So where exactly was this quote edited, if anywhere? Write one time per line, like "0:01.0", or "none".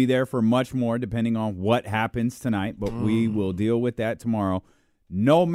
none